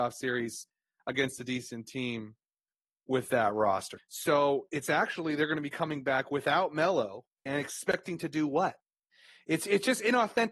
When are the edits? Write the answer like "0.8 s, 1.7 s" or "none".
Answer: 4.0 s, 7.3 s

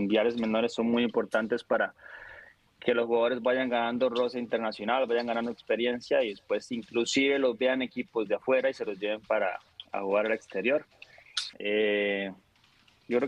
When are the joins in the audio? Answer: 11.5 s

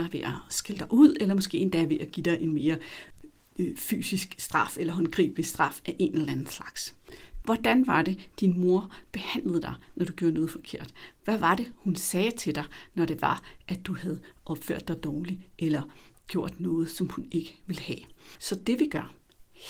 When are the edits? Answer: 7.4 s, 18.4 s

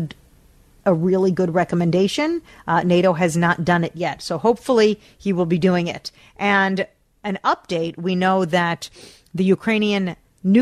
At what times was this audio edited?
none

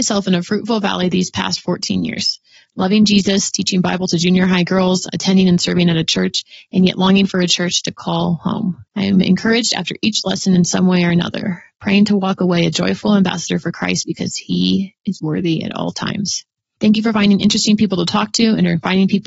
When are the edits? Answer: 8.9 s

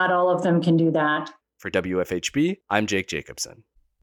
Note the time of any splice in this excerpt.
1.4 s, 2.6 s

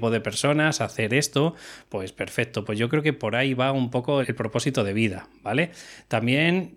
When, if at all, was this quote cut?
4.2 s

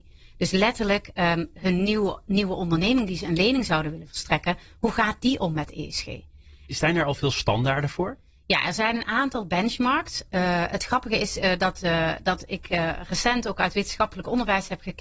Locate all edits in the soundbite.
1.5 s, 6.7 s

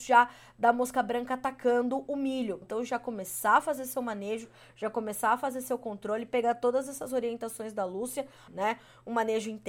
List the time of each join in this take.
2.6 s, 8.5 s

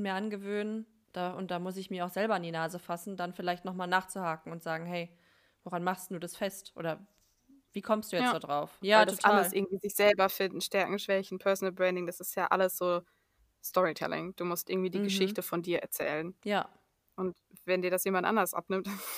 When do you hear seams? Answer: 8.8 s

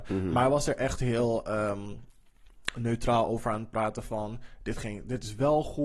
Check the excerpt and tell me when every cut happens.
none

